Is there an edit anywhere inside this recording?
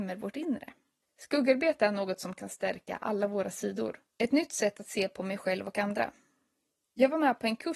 yes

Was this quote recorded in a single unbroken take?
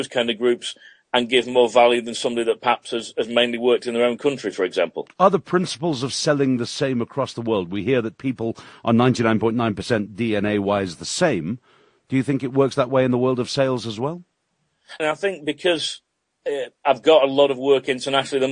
no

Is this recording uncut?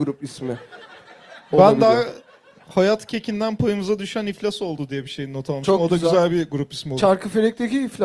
yes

